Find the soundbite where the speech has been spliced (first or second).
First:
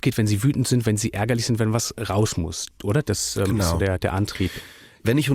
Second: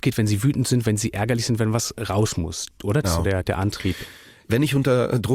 second